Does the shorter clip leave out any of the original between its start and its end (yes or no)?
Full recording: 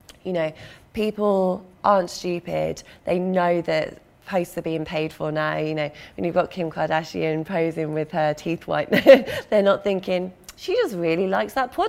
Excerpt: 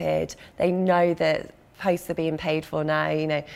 no